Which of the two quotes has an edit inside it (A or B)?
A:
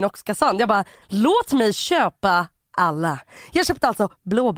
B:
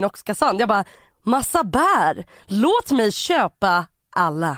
A